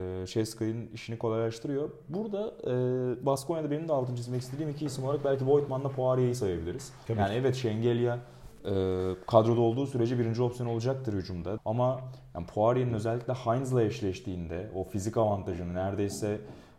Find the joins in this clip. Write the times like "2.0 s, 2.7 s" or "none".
11.6 s

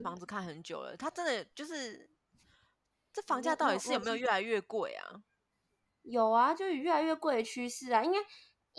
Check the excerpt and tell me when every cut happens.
none

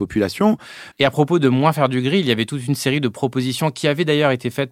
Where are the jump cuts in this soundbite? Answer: 0.9 s

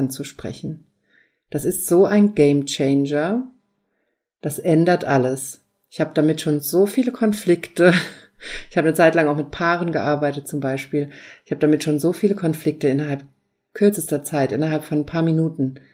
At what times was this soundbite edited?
none

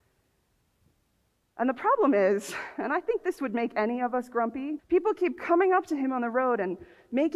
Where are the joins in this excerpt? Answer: 4.8 s

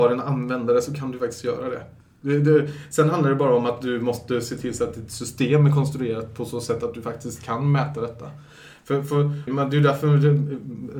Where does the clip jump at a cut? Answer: 9.5 s

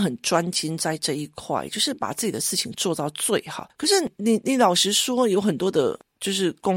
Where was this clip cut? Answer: none

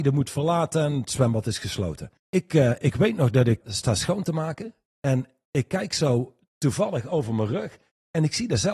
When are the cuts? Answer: 2.2 s, 3.6 s

